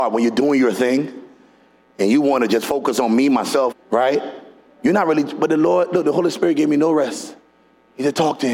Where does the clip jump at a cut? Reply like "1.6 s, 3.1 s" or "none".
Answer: 3.7 s